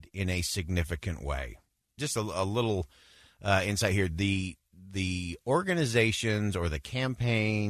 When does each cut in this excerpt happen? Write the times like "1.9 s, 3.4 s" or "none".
2.0 s

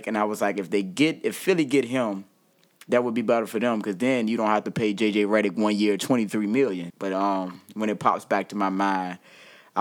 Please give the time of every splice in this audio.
6.9 s

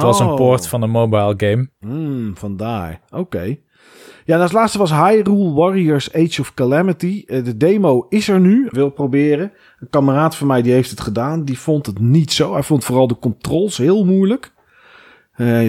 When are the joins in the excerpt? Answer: 8.7 s

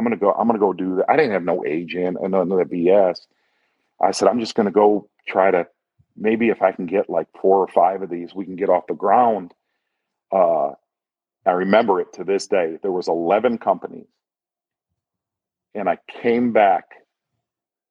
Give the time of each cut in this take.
none

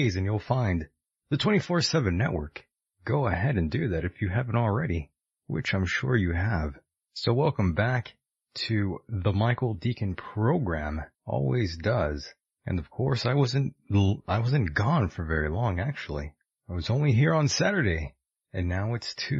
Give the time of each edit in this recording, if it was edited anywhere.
11.1 s

